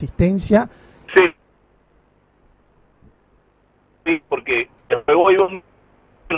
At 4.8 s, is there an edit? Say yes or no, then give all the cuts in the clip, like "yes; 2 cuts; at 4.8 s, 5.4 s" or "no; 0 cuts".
yes; 2 cuts; at 1.1 s, 4.8 s